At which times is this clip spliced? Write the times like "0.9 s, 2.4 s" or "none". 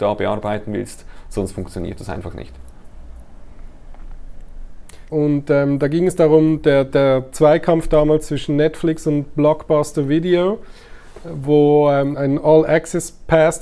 5.1 s, 12.1 s